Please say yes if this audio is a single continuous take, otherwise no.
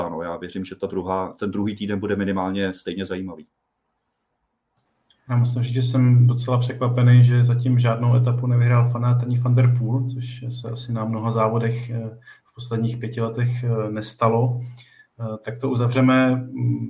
yes